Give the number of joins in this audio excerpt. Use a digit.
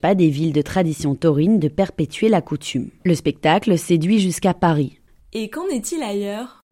2